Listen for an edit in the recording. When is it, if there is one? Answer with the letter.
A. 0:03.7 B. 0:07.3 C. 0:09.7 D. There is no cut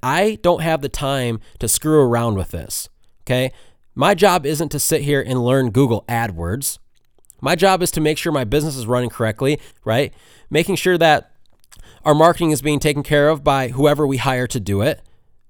C